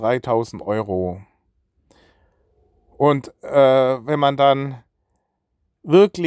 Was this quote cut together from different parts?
no; 0 cuts

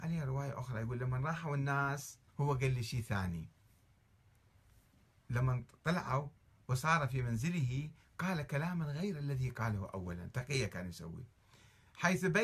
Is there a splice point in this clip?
yes; 1 cut; at 2.3 s

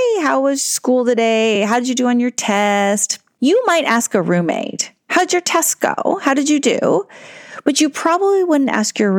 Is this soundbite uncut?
yes; 0 cuts

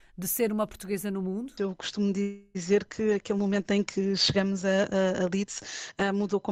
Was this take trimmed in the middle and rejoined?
yes; 1 cut; at 1.6 s

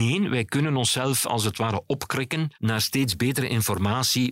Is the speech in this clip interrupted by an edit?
yes; 1 cut; at 2.5 s

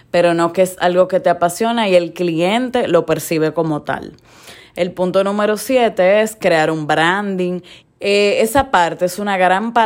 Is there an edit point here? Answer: yes; 2 cuts; at 4.6 s, 7.8 s

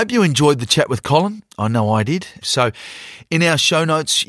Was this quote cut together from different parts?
yes; 1 cut; at 2.4 s

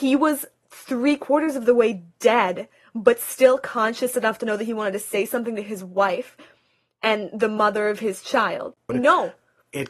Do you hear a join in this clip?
yes; 1 cut; at 8.9 s

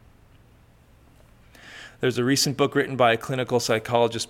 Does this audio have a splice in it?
no; 0 cuts

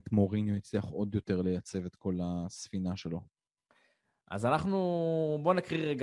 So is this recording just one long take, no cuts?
yes; 0 cuts

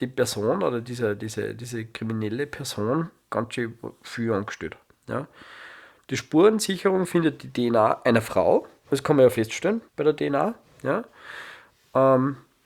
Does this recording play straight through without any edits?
no; 2 cuts; at 3.3 s, 9.9 s

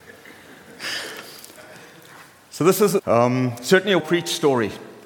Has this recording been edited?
yes; 2 cuts; at 3.0 s, 4.0 s

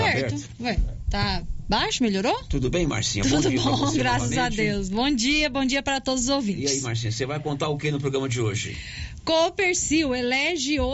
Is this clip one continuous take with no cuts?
yes; 0 cuts

